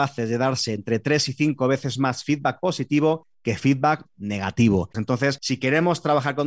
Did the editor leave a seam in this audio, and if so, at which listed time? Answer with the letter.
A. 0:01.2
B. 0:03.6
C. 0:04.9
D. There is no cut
C